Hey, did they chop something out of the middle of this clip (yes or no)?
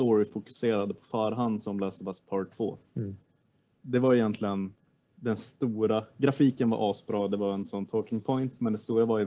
no